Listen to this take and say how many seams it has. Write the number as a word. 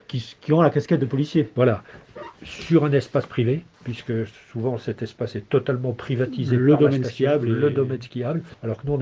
zero